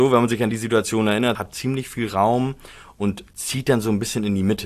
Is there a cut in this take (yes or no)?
yes